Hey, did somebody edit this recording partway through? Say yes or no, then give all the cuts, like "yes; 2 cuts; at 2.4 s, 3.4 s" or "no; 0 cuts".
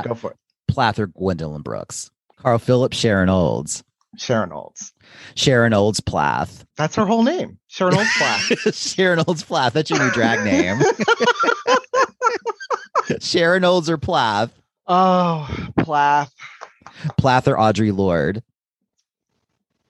yes; 2 cuts; at 2.3 s, 6.7 s